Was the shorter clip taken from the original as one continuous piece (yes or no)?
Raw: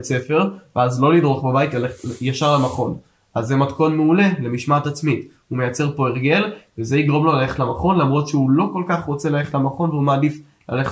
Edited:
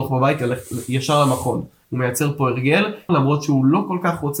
no